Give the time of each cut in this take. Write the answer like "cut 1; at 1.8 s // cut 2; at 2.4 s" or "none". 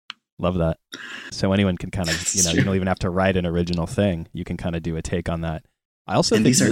cut 1; at 1.3 s